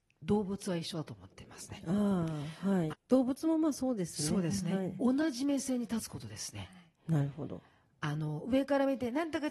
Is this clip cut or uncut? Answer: cut